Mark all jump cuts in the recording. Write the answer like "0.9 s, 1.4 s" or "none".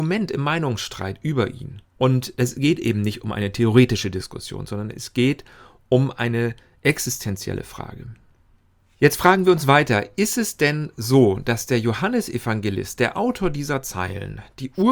1.9 s